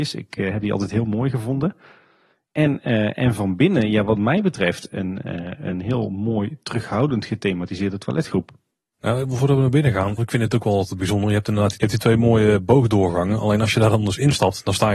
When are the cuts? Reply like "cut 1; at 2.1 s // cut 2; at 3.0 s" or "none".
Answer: cut 1; at 10.2 s